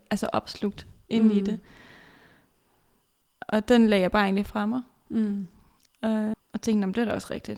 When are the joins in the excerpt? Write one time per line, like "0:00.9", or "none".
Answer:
0:06.3